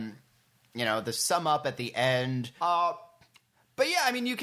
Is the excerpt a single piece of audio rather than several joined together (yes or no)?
no